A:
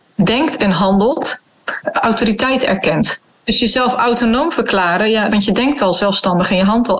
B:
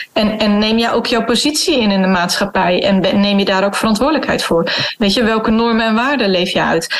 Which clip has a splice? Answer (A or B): A